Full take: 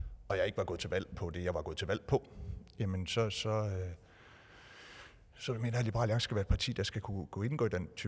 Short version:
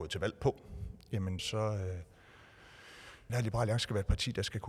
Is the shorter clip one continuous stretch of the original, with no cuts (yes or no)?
no